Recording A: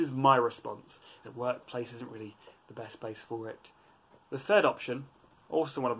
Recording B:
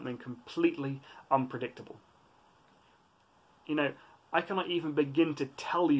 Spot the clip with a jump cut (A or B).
A